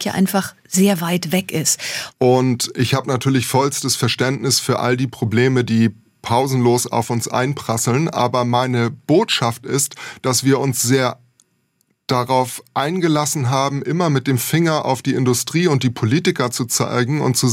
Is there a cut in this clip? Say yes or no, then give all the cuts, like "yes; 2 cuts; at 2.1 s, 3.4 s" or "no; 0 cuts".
yes; 1 cut; at 2.1 s